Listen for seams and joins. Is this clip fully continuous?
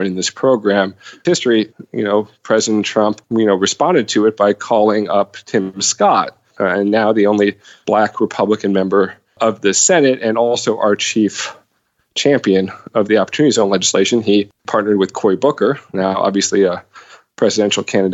no; 2 cuts; at 1.3 s, 6.5 s

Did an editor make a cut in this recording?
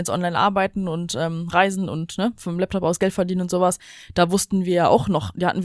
no; 0 cuts

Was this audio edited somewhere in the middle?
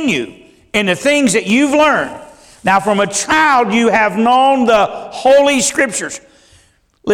no; 0 cuts

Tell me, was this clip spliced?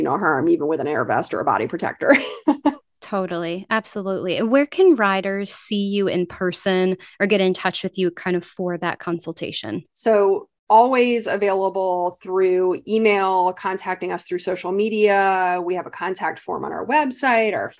yes; 1 cut; at 9.9 s

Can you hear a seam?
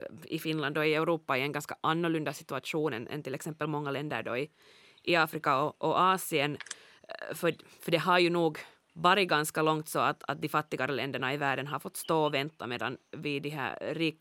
no; 0 cuts

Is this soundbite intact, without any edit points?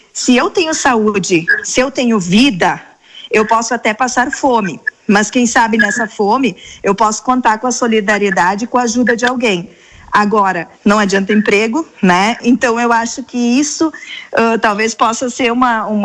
no; 2 cuts; at 10.7 s, 11.9 s

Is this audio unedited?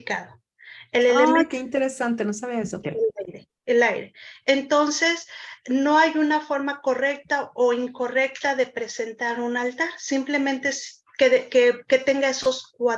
no; 1 cut; at 2.8 s

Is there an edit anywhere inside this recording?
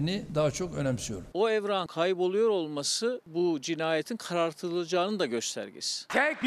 yes; 1 cut; at 1.3 s

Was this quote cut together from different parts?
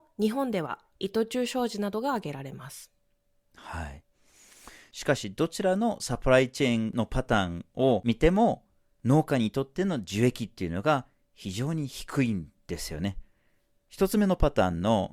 no; 0 cuts

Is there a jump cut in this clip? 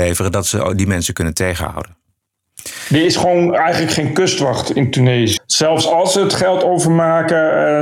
yes; 1 cut; at 5.4 s

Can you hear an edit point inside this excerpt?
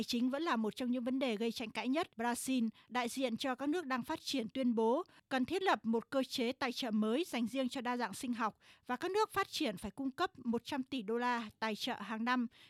yes; 1 cut; at 2.1 s

